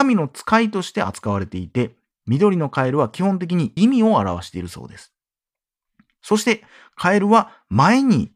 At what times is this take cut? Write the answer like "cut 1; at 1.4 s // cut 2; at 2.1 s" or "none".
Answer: cut 1; at 3.8 s